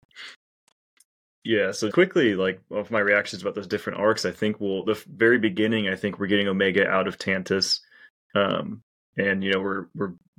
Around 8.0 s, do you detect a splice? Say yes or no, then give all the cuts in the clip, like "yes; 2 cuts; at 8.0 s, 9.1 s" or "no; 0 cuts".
no; 1 cut; at 1.9 s